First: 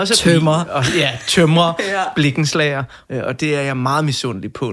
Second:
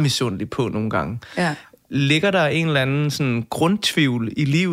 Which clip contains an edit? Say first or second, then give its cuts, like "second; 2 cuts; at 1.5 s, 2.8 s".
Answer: first; 1 cut; at 3.1 s